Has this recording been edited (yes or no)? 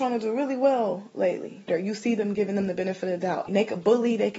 yes